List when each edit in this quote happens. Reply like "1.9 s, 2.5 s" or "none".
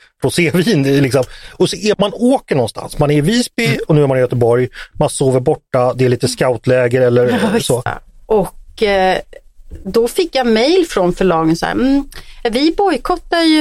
1.9 s, 7.9 s